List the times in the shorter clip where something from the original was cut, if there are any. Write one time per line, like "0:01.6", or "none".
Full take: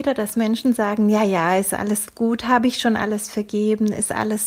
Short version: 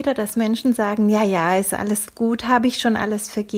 none

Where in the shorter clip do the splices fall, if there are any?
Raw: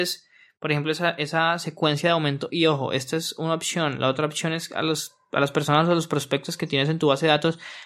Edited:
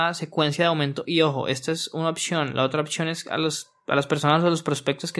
none

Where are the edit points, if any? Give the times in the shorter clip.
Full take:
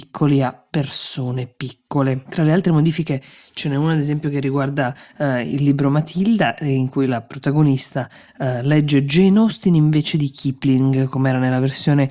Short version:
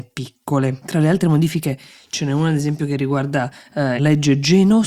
0:04.0

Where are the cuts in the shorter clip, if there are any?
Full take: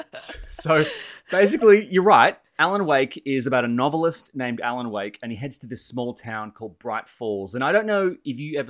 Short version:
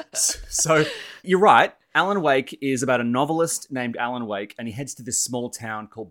0:01.2

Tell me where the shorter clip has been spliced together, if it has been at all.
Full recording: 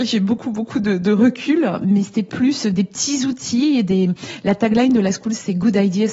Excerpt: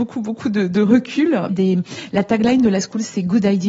0:01.5

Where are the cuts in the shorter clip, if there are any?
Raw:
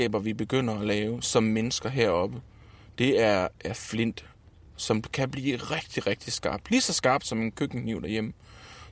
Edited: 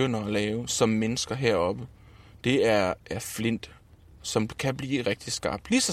0:05.0

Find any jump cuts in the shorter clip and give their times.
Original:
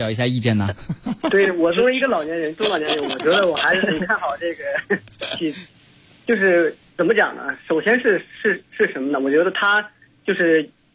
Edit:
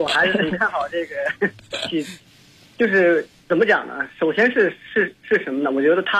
none

